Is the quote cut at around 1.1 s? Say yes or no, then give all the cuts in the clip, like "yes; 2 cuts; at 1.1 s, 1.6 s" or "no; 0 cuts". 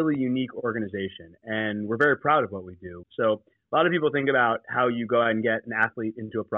no; 1 cut; at 3.0 s